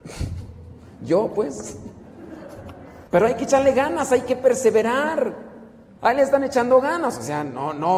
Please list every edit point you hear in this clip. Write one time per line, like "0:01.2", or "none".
0:03.1
0:06.0